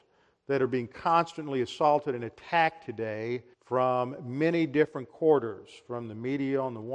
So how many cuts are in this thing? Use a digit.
1